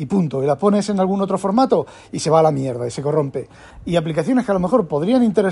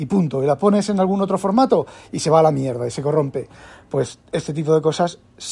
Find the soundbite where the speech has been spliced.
first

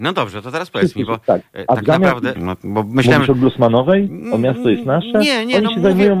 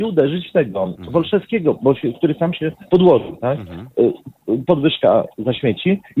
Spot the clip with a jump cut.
first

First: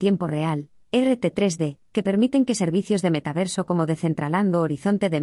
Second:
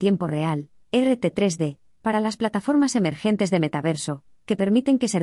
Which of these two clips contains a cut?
first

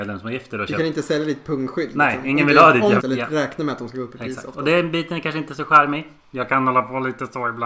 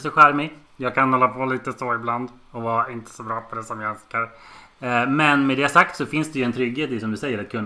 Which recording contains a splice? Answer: first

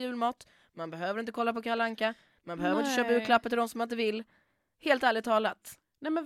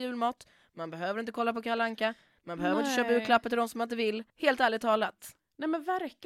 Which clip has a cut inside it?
second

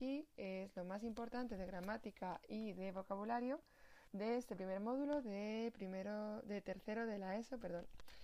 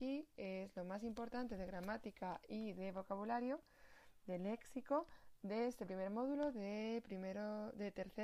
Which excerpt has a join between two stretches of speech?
first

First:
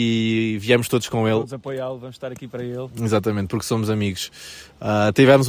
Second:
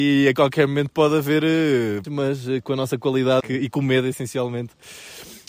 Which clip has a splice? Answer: second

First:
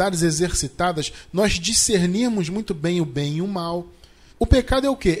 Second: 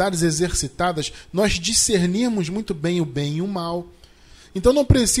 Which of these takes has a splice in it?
first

